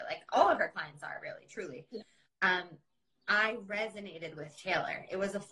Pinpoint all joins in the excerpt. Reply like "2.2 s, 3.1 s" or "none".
3.1 s